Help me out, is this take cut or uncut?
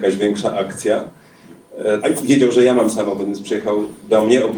cut